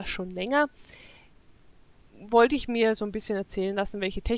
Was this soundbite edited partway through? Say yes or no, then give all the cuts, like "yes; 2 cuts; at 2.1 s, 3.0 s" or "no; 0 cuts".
no; 0 cuts